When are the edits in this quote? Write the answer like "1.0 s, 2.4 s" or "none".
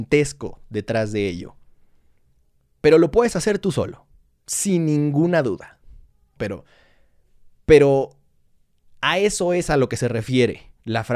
6.4 s

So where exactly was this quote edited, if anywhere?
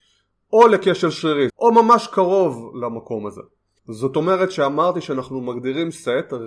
1.5 s, 3.8 s

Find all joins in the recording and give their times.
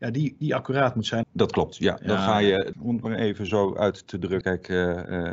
1.2 s, 2.7 s, 4.4 s

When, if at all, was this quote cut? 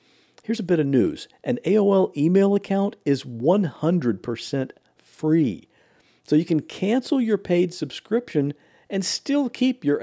none

